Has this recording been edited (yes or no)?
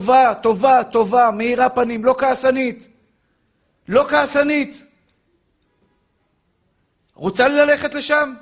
no